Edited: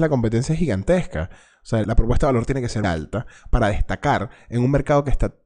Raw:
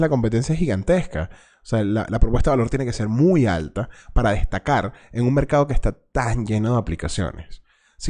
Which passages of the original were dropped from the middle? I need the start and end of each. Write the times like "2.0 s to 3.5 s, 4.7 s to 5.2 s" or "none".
1.8 s to 2.1 s, 3.1 s to 3.5 s